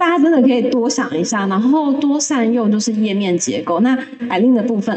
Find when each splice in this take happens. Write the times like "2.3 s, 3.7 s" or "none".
none